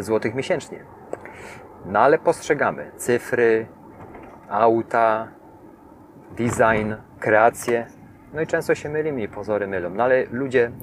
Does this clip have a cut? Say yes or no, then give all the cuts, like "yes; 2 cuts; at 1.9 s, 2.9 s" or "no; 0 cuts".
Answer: yes; 1 cut; at 7.1 s